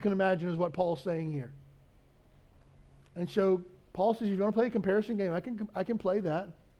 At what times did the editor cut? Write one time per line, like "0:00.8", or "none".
none